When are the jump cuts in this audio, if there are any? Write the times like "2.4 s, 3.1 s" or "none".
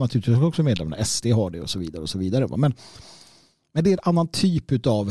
none